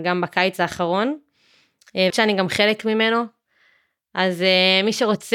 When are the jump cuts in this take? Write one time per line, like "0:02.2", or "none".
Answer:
0:02.1